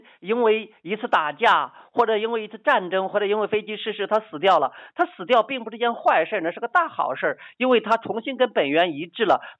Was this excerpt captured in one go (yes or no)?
no